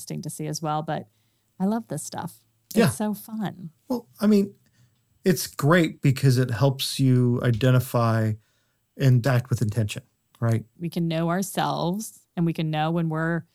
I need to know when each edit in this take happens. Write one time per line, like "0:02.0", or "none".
0:09.2
0:10.8